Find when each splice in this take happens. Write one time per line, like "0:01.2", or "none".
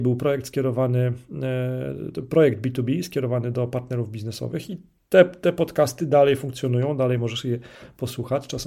none

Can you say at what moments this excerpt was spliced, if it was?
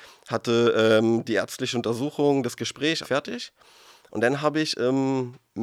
0:03.0

